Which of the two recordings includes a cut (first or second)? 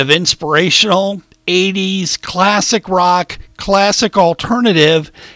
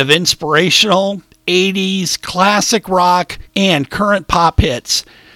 second